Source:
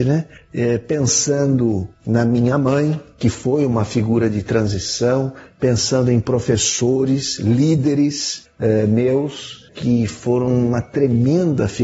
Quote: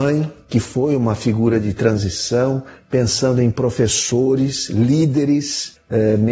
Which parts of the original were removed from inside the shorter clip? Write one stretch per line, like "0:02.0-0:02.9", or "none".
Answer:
none